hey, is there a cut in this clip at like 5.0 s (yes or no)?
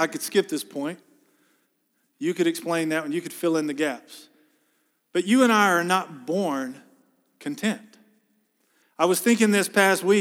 no